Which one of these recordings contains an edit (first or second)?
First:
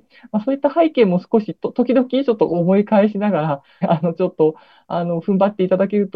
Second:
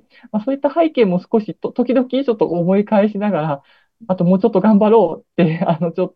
first